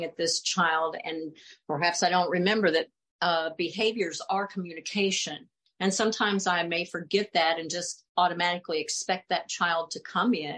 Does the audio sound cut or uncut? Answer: uncut